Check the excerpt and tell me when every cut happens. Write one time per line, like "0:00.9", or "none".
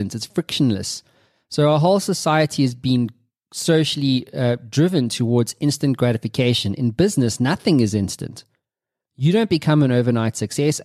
none